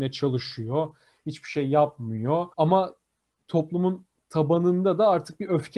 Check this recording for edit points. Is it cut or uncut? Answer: cut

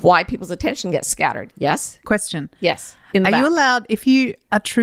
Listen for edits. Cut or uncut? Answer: uncut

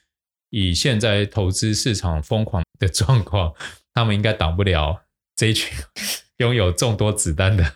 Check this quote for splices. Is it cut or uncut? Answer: cut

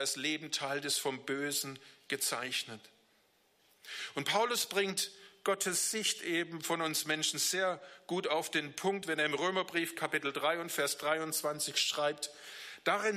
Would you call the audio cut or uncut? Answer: uncut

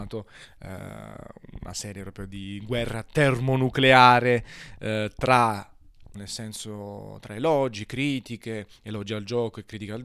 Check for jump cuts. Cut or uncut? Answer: cut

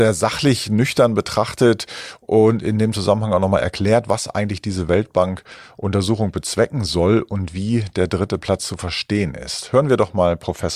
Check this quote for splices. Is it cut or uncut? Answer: uncut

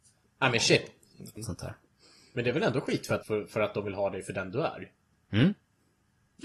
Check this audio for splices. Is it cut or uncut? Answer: cut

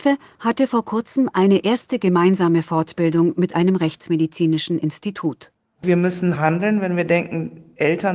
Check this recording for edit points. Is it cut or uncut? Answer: cut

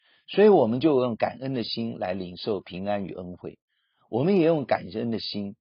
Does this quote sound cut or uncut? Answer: uncut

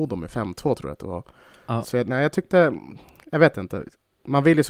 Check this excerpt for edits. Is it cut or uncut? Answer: cut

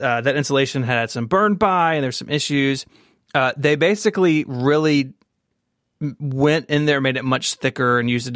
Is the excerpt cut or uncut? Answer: uncut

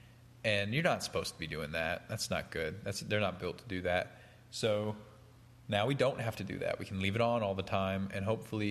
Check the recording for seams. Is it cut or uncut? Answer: uncut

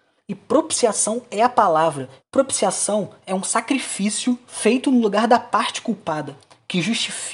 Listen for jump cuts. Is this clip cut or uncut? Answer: cut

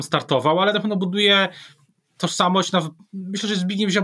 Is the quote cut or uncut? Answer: uncut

